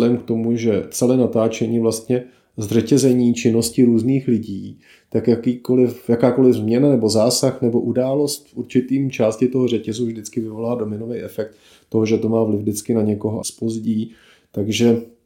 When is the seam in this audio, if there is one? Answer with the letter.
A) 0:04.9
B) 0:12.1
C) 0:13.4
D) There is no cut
C